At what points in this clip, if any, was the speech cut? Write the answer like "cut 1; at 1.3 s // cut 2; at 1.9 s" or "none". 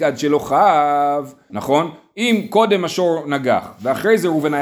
cut 1; at 1.5 s